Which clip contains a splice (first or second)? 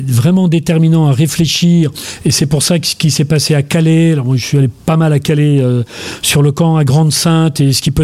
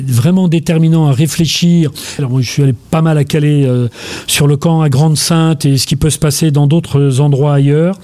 second